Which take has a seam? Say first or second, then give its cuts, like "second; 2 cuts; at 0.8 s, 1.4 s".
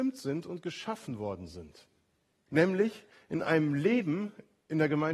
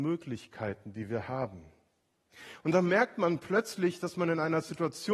first; 1 cut; at 2.5 s